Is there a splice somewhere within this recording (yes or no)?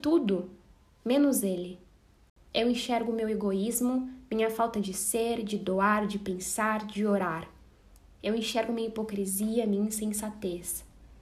yes